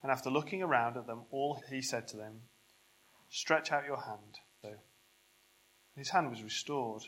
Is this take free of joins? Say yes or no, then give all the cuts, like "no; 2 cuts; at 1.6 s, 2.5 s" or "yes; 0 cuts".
no; 2 cuts; at 1.6 s, 4.6 s